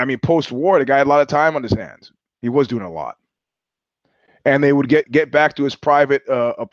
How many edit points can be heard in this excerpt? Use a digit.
2